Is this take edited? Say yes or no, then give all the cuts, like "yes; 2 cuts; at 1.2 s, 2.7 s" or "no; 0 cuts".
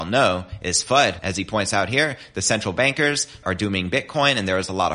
yes; 1 cut; at 3.4 s